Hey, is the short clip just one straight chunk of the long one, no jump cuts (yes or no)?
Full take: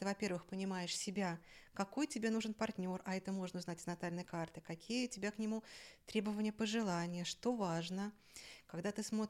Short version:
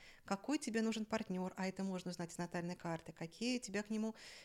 yes